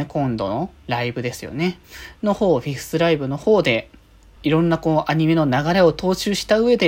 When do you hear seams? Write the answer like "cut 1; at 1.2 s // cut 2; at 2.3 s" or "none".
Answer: cut 1; at 4.4 s